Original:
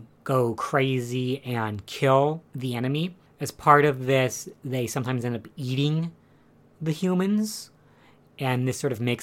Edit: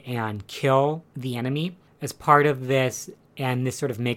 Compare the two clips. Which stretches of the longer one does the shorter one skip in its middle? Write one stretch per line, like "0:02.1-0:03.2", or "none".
0:04.6-0:08.2